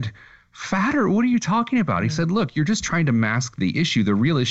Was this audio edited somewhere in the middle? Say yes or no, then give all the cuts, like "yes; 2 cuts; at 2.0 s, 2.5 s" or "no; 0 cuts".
no; 0 cuts